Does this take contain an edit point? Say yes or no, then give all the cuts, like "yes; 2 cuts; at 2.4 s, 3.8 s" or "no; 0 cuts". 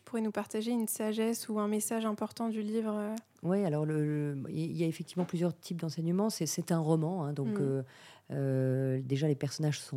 no; 0 cuts